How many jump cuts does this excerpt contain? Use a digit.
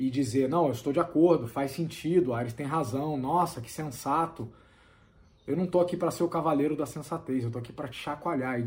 0